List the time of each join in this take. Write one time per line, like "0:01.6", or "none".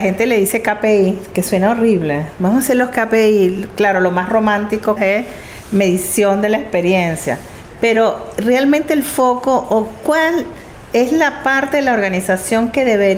0:05.0